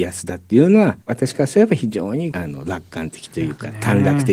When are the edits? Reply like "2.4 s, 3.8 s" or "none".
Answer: 1.0 s, 2.3 s